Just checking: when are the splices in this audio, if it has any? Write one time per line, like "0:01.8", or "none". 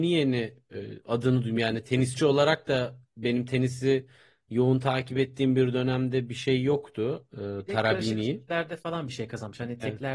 none